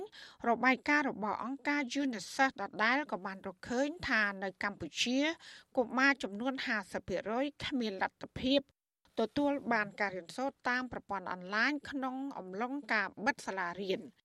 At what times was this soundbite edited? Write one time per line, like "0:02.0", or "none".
none